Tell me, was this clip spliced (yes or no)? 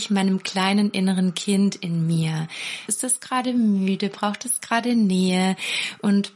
yes